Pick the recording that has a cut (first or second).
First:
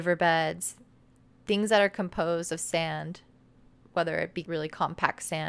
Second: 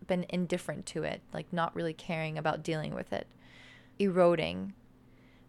second